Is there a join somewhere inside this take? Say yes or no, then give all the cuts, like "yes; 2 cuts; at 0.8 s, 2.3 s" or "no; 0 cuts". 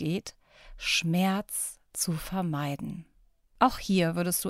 yes; 1 cut; at 3.4 s